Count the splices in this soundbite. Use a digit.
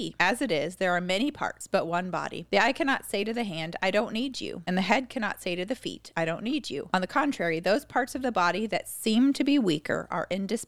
0